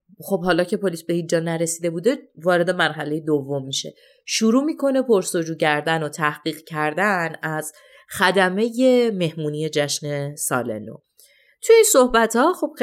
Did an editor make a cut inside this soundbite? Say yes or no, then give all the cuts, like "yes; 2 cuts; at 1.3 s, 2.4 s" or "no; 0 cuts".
no; 0 cuts